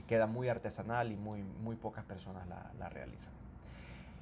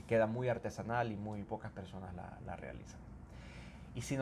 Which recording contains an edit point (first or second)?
second